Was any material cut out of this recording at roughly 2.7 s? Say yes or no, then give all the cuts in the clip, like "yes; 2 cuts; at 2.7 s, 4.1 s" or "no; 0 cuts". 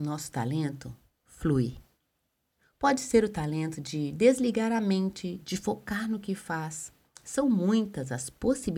no; 1 cut; at 5.4 s